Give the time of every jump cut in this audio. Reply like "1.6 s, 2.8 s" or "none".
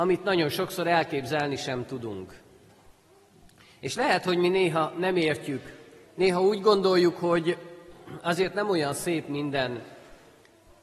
none